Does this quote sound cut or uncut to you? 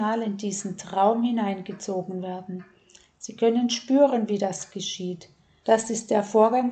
cut